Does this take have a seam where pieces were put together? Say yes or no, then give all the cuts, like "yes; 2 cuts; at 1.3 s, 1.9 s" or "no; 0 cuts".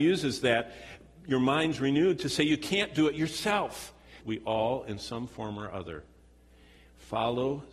yes; 1 cut; at 4.2 s